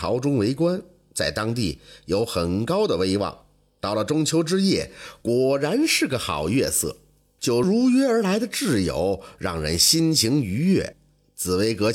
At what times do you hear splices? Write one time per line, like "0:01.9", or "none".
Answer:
0:07.6

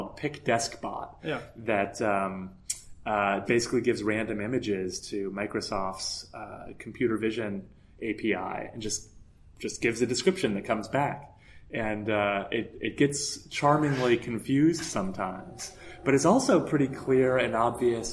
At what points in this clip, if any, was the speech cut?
0:03.5

